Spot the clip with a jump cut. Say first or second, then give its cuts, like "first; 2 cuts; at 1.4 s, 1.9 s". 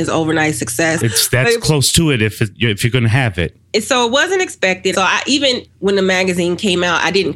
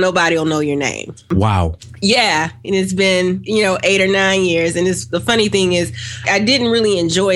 first; 1 cut; at 4.9 s